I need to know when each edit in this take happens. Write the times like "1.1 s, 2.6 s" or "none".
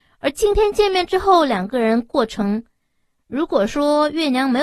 3.2 s